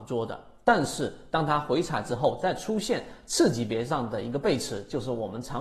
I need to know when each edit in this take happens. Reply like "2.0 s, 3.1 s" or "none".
none